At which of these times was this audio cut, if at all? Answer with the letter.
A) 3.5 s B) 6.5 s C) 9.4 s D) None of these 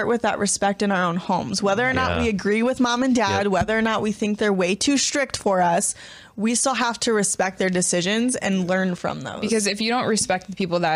D